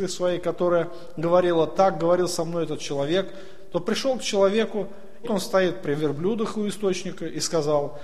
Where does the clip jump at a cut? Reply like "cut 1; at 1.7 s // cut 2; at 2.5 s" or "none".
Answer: cut 1; at 5.2 s